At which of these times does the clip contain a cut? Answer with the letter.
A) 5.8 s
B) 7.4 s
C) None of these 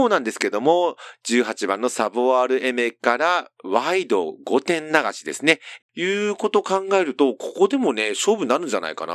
A